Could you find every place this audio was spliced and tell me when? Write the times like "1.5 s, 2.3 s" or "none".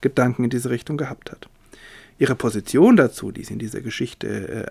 none